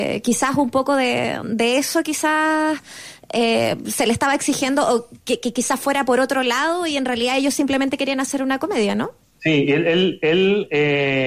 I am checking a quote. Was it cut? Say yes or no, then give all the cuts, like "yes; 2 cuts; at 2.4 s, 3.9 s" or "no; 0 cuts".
no; 0 cuts